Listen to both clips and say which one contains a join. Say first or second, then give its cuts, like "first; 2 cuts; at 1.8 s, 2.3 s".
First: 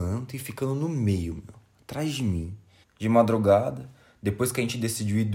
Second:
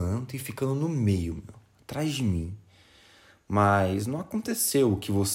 first; 1 cut; at 2.8 s